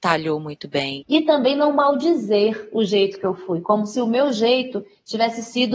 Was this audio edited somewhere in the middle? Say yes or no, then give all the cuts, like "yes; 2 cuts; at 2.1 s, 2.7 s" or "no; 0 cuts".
yes; 1 cut; at 1.0 s